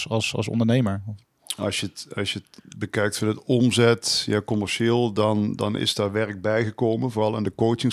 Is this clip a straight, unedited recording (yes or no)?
yes